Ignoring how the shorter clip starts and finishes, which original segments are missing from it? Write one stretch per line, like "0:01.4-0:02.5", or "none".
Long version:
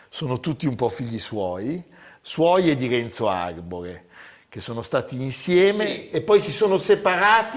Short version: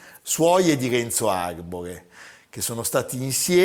none